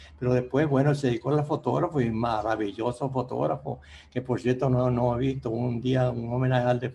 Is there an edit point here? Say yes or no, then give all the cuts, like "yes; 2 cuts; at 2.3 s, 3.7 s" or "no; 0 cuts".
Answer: no; 0 cuts